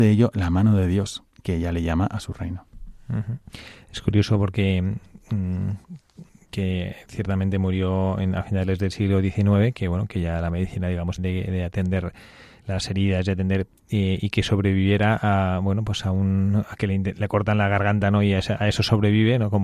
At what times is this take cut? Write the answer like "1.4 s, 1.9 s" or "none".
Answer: 11.2 s